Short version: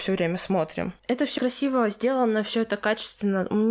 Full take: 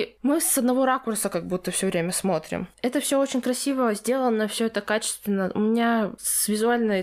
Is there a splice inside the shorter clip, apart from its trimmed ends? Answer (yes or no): yes